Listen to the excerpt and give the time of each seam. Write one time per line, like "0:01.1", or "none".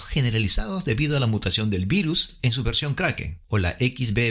none